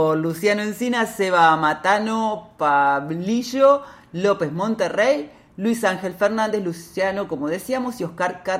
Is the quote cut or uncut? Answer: uncut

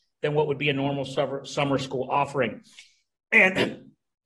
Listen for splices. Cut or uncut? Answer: uncut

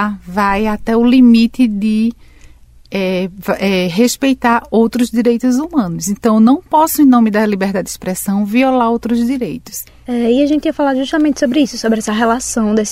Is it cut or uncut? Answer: uncut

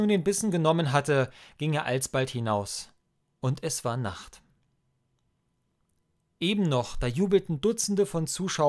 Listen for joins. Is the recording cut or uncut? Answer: uncut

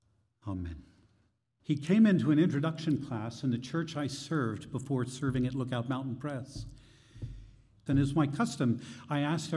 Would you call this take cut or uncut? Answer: cut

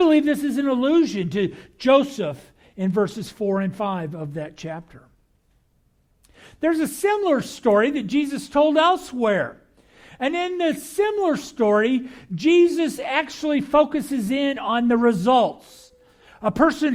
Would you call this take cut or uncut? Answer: uncut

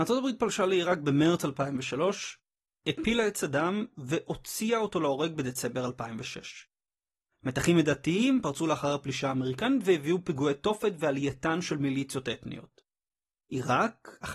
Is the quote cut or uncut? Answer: uncut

